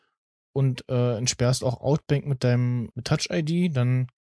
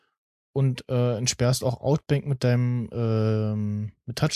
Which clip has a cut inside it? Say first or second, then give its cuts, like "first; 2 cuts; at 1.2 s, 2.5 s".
first; 1 cut; at 2.9 s